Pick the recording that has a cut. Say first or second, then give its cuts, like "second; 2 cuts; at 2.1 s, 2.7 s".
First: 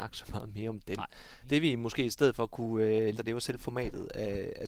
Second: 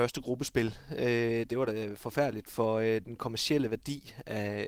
first; 2 cuts; at 1.4 s, 3.2 s